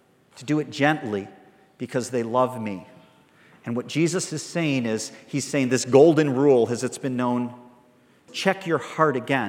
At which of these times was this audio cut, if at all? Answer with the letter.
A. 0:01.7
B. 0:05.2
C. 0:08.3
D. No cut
C